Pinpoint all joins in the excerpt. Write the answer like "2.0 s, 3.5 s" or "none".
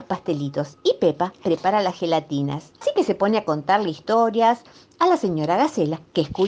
2.8 s